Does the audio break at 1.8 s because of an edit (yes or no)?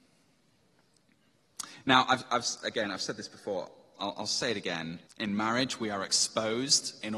no